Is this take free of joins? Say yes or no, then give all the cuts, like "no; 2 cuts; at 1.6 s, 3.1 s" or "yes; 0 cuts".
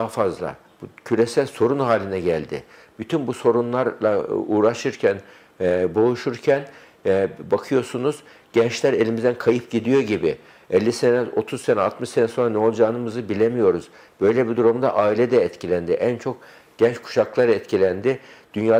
yes; 0 cuts